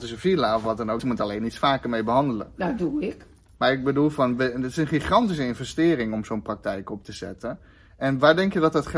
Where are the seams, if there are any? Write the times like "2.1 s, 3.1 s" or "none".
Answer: 1.0 s